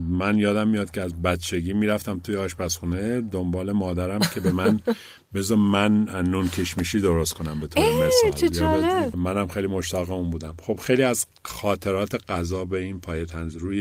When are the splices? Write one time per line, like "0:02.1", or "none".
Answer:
0:09.1